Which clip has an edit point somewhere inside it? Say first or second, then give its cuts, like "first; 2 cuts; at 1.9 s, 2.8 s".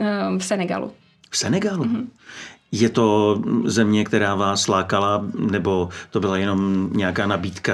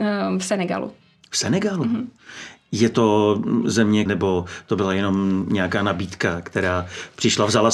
second; 1 cut; at 4.1 s